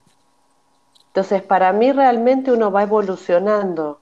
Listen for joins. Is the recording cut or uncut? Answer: uncut